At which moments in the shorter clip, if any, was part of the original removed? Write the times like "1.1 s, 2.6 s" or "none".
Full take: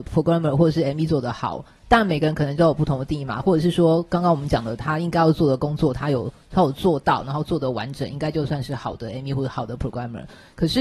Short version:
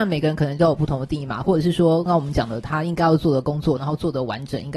2.1 s, 3.8 s